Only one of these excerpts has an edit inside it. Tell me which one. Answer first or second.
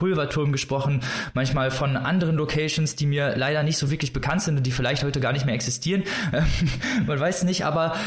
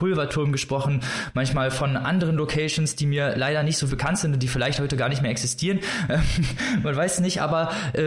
second